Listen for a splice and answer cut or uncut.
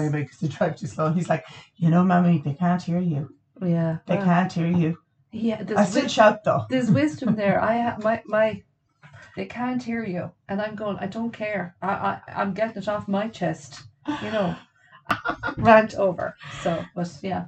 cut